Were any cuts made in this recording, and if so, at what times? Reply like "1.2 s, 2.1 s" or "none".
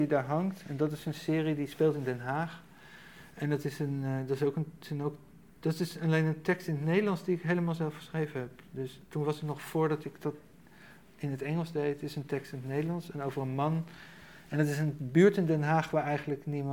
none